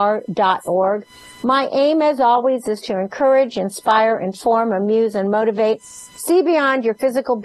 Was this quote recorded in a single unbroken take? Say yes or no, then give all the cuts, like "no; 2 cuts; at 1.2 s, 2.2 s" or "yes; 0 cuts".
yes; 0 cuts